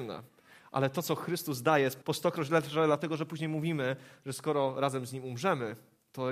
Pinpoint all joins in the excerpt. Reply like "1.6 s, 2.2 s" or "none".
2.0 s